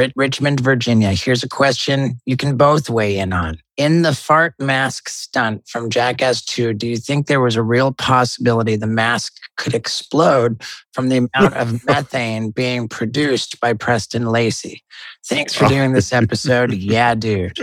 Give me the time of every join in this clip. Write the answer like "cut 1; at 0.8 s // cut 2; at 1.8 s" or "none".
none